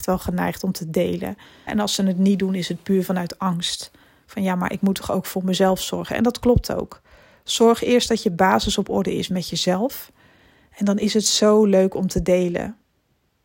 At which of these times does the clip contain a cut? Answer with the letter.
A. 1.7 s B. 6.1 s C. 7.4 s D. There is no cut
A